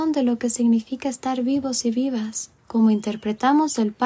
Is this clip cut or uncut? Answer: cut